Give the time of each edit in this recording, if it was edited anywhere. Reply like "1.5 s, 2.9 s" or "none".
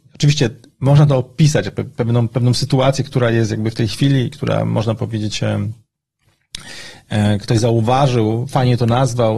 none

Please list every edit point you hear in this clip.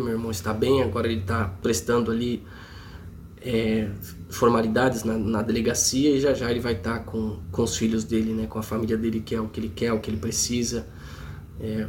7.4 s

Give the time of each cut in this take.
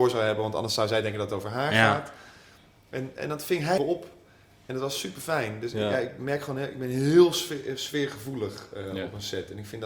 3.8 s

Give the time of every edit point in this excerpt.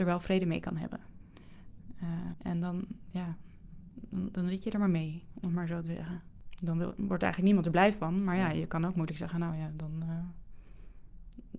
2.3 s

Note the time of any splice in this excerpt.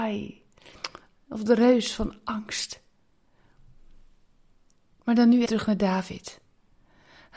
5.5 s

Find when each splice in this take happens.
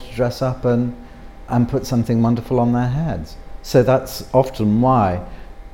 1.5 s

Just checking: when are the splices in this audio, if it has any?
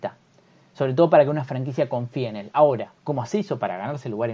3.0 s

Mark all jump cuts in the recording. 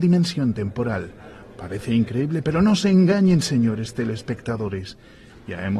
none

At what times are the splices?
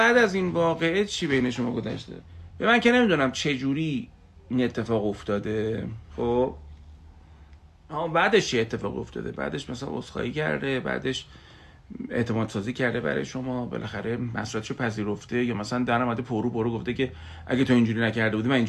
none

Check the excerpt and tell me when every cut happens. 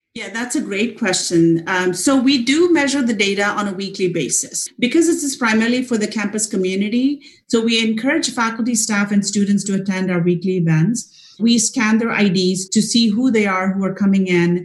12.7 s

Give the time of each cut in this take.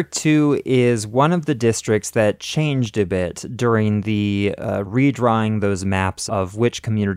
4.9 s, 6.3 s

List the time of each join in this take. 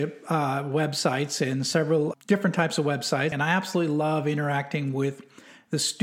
2.1 s, 3.3 s

